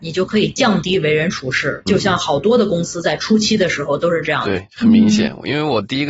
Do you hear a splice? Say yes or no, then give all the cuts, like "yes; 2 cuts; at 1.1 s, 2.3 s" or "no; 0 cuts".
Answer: yes; 2 cuts; at 1.9 s, 4.6 s